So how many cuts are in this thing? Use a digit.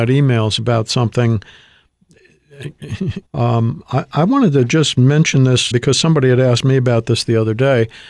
2